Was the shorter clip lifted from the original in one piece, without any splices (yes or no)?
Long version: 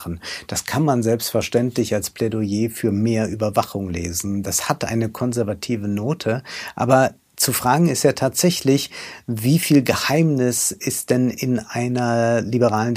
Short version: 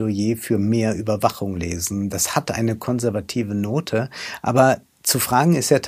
yes